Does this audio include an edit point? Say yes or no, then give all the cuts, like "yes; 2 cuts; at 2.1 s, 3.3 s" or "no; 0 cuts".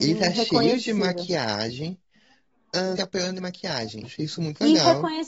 yes; 2 cuts; at 3.0 s, 4.0 s